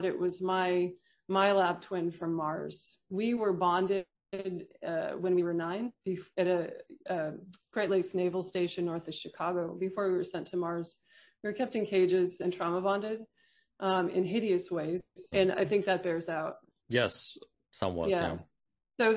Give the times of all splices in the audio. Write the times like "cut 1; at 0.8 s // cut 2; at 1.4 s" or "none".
cut 1; at 15.3 s // cut 2; at 16.8 s